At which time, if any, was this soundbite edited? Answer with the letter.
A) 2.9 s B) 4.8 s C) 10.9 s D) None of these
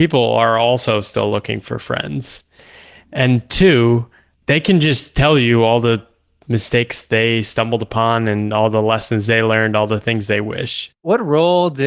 C